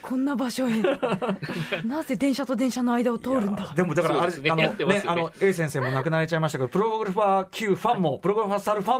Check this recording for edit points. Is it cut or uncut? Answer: uncut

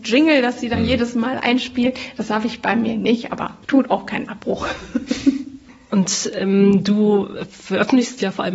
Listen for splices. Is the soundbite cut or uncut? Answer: cut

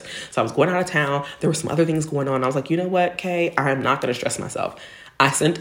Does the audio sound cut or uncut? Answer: uncut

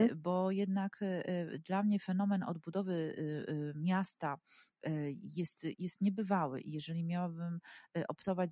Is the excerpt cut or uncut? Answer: uncut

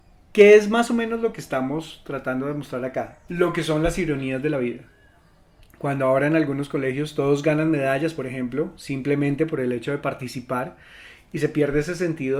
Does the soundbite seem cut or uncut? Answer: cut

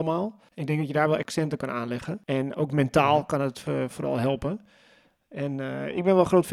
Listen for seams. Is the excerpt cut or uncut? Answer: uncut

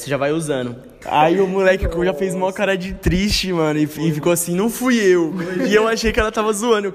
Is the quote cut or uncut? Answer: cut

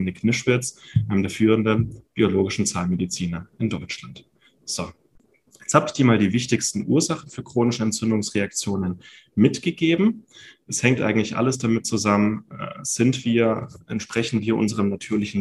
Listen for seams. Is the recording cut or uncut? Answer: uncut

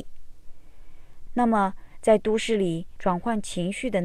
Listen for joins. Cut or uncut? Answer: cut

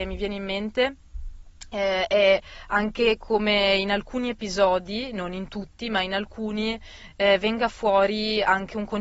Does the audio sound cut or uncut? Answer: uncut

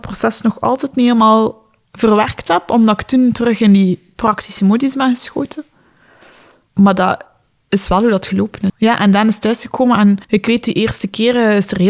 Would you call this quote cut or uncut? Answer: cut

